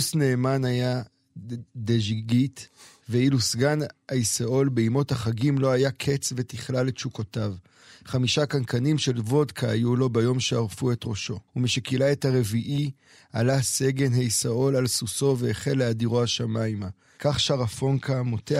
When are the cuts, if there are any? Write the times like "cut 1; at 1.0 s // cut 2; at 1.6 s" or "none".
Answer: cut 1; at 11.5 s // cut 2; at 17.1 s